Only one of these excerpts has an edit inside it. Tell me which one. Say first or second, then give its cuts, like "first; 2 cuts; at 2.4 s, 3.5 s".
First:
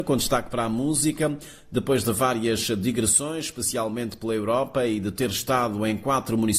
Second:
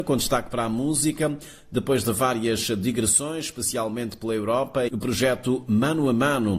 second; 1 cut; at 4.9 s